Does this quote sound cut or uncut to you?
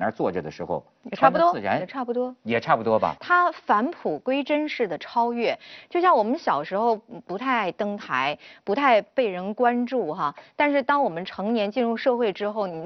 cut